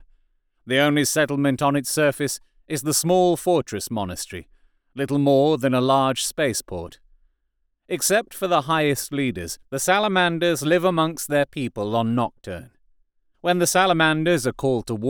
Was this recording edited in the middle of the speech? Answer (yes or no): yes